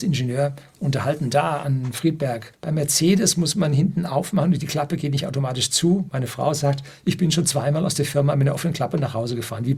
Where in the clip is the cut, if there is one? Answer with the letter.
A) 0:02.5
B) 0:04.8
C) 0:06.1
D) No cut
A